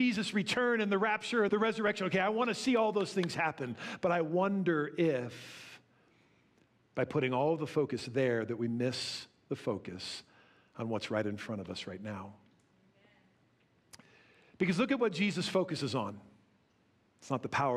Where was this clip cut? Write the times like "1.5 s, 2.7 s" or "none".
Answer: 1.5 s